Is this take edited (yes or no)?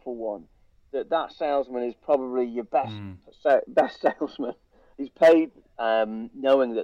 yes